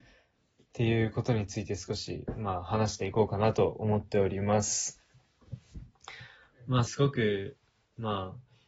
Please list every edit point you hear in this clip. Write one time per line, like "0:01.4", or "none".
0:06.9